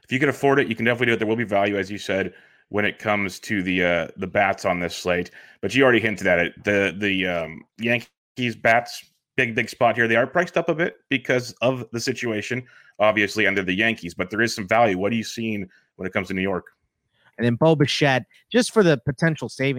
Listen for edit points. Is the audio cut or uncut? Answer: cut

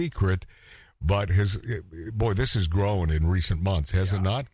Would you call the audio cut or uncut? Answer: uncut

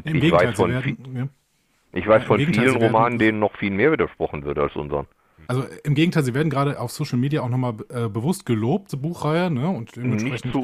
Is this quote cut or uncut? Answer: cut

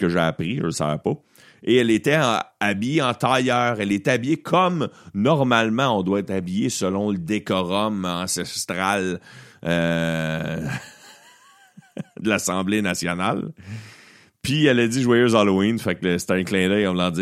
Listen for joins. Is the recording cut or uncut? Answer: uncut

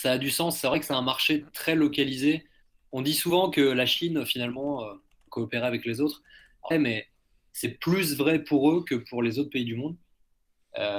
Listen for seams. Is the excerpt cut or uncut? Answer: cut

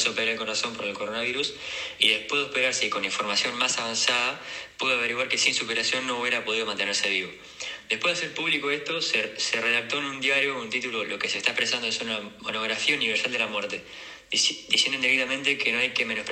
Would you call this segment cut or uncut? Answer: uncut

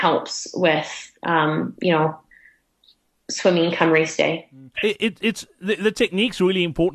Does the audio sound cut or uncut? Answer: cut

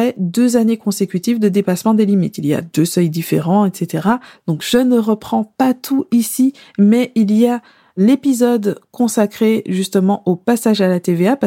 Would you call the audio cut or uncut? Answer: uncut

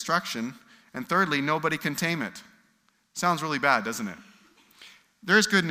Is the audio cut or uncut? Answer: uncut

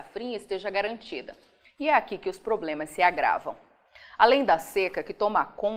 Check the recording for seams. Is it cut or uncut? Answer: uncut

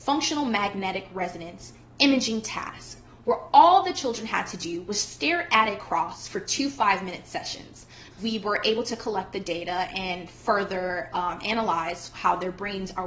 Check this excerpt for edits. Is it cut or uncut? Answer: cut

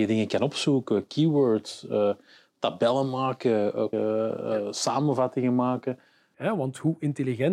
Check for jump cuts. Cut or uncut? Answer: cut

